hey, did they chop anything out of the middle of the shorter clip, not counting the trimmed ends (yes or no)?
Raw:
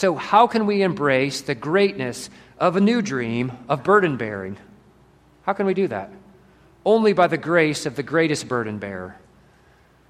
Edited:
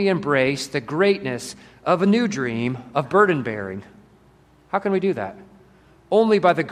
no